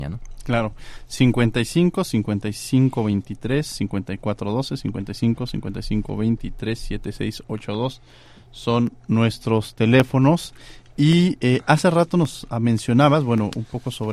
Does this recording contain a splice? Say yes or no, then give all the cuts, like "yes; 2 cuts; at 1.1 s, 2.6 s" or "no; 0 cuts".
no; 0 cuts